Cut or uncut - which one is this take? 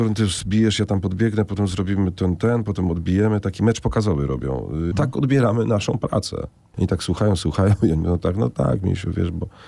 cut